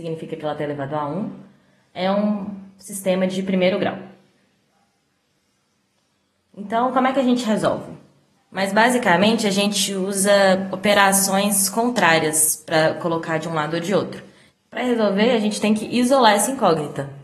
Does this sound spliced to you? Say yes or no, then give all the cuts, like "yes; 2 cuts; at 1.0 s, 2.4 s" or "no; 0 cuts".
yes; 2 cuts; at 8.4 s, 14.5 s